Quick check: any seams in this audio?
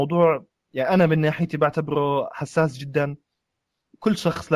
no; 0 cuts

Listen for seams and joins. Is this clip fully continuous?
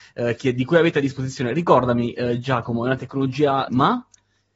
no; 1 cut; at 3.7 s

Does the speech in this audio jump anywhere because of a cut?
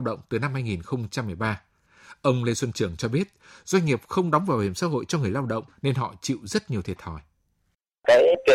no; 0 cuts

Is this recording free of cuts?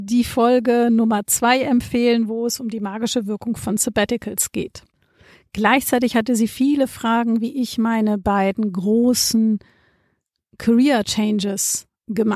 yes; 0 cuts

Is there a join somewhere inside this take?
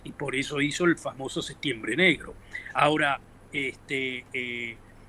no; 0 cuts

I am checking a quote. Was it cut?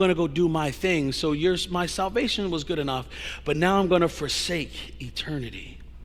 no; 0 cuts

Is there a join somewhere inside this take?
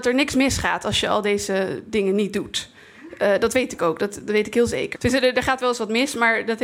yes; 1 cut; at 4.9 s

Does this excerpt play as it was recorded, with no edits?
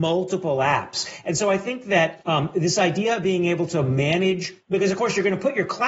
yes; 0 cuts

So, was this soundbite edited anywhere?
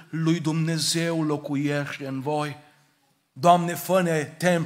no; 0 cuts

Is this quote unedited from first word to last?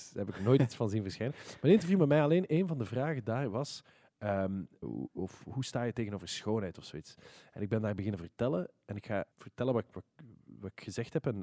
no; 2 cuts; at 4.8 s, 9.3 s

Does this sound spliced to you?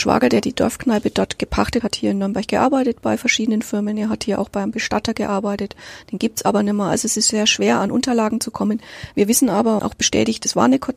yes; 2 cuts; at 1.8 s, 9.8 s

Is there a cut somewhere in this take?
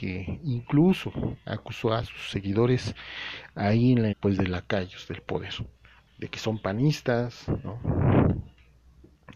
yes; 2 cuts; at 4.1 s, 6.1 s

